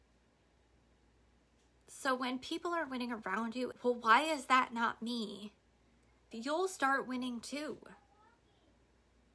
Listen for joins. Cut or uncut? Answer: cut